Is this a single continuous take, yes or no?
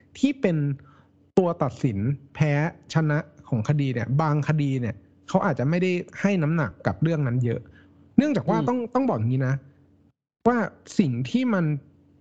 yes